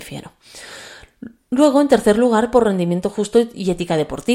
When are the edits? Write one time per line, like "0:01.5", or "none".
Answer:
none